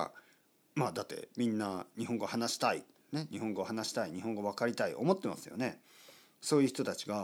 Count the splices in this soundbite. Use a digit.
0